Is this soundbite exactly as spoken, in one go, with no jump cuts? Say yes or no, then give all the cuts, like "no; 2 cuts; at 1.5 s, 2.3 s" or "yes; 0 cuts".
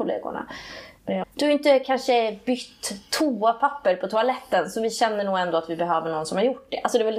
no; 1 cut; at 1.2 s